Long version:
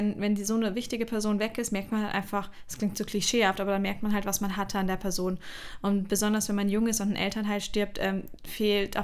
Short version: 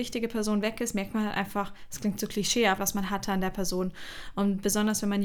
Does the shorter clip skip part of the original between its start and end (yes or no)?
yes